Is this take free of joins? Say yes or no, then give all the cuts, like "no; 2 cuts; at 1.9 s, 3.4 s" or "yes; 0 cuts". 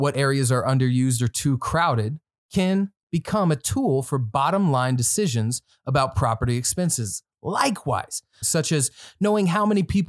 no; 1 cut; at 8.4 s